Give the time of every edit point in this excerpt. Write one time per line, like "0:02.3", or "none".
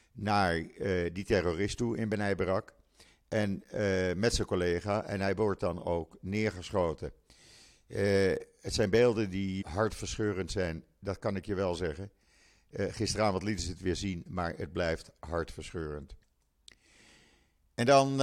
0:09.6